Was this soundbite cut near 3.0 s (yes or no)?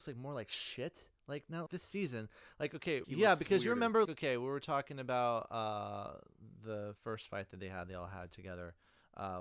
yes